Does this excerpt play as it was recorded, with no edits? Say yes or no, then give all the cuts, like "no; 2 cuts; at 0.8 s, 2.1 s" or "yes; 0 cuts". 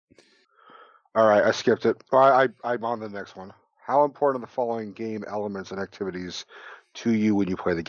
yes; 0 cuts